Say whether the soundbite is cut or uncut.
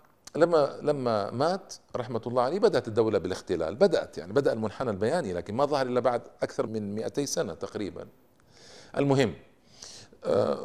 cut